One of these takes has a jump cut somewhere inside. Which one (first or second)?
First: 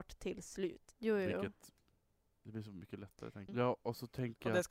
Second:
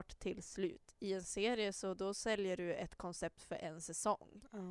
first